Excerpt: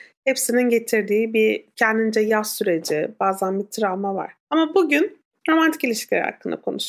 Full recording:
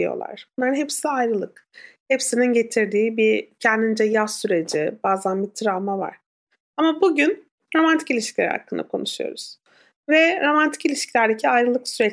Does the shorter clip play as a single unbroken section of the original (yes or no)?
no